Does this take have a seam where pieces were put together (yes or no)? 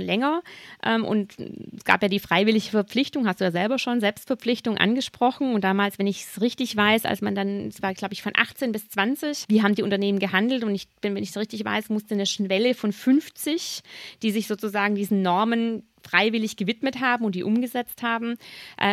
yes